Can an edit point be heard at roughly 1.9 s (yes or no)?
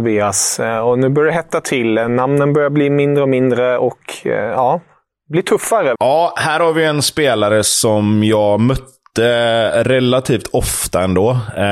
no